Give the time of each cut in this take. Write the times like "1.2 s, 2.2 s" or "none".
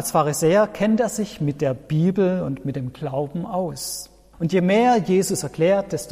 4.3 s